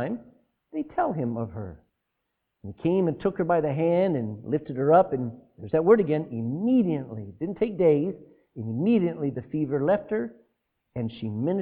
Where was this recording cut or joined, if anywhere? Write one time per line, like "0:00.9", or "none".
none